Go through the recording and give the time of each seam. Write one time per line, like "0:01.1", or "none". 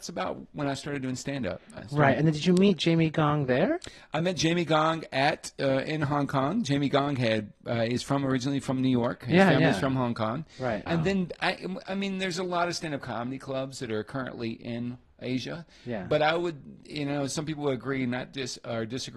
0:10.9